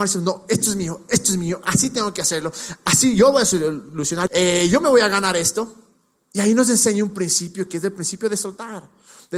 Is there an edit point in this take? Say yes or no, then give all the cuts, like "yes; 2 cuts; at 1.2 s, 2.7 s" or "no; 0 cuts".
yes; 2 cuts; at 4.3 s, 6.2 s